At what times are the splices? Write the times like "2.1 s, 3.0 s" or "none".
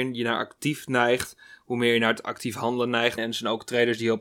3.2 s